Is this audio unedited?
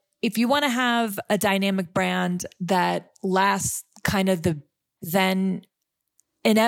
no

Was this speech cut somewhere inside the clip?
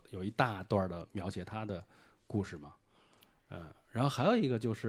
no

